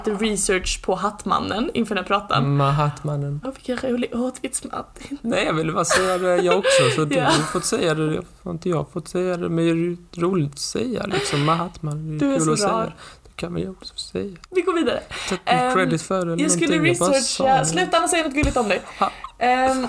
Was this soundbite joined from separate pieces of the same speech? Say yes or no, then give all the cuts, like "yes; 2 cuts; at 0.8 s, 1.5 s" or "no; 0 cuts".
yes; 2 cuts; at 3.4 s, 14.4 s